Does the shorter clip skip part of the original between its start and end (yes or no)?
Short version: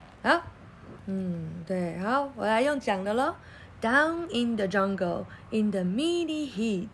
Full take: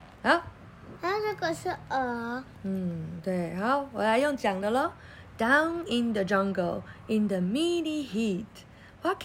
yes